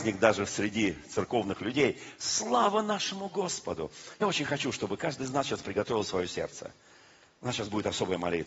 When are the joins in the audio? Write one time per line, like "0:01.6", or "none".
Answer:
none